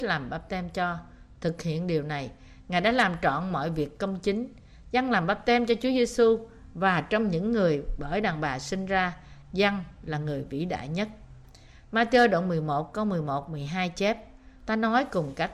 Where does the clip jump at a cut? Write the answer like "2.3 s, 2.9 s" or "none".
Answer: 14.6 s